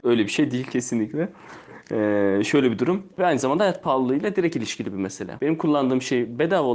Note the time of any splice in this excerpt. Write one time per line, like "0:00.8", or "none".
0:03.1
0:05.4